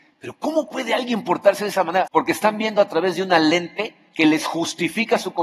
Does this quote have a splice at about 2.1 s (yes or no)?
yes